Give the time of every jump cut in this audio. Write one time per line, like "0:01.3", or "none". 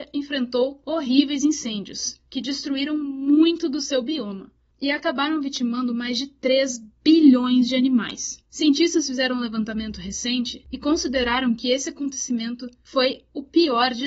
0:08.4